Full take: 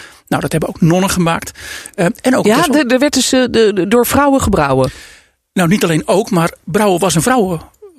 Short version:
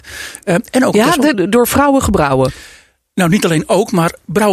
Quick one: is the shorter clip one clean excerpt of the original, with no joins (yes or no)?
no